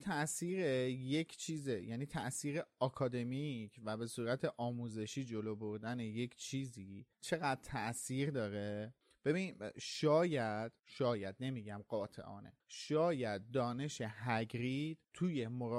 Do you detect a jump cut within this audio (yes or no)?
no